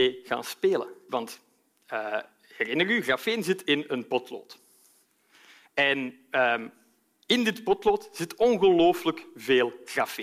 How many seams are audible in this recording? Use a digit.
1